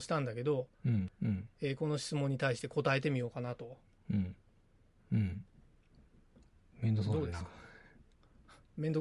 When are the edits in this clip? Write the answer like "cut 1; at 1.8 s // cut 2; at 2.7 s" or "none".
cut 1; at 1.1 s // cut 2; at 5.0 s